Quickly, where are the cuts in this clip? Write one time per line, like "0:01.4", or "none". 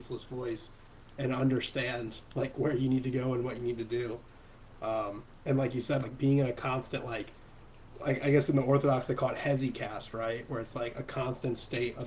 0:06.0